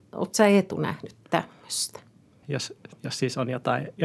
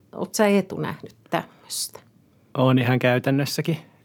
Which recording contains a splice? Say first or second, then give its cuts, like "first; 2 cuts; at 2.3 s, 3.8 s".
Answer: first; 1 cut; at 2.4 s